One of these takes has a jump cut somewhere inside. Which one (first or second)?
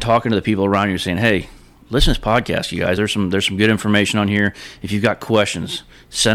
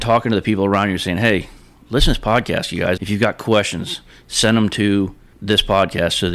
second